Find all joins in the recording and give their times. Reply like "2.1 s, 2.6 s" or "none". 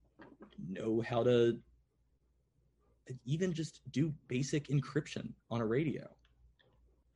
none